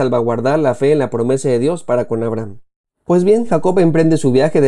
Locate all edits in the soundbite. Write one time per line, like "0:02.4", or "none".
none